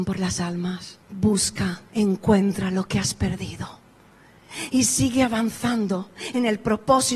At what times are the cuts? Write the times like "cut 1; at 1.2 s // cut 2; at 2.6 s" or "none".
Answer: cut 1; at 1.0 s